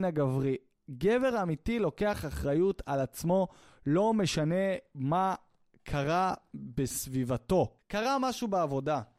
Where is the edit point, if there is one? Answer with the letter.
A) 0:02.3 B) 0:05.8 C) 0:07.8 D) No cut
C